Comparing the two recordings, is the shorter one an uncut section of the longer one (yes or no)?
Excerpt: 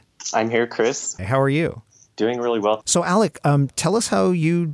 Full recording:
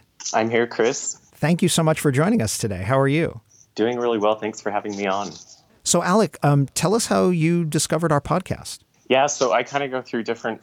no